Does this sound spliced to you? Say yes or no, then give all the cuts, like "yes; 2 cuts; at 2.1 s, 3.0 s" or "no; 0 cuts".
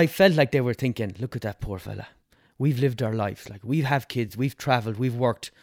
no; 0 cuts